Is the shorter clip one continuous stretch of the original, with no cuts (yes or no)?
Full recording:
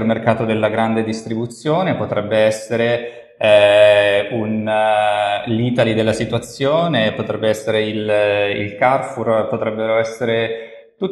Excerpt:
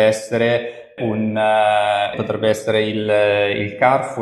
no